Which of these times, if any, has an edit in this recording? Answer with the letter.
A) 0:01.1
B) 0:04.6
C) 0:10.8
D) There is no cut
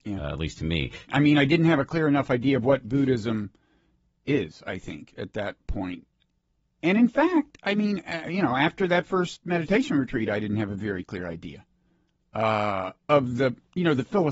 A